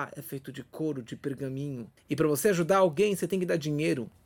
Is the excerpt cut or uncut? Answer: uncut